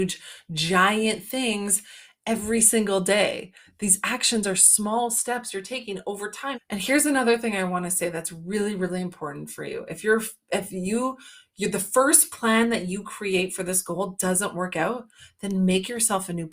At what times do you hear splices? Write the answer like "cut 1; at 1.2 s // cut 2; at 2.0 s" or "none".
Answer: cut 1; at 6.5 s